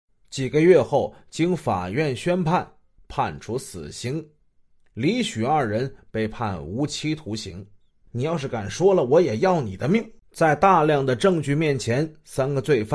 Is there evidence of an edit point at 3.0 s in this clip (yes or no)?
yes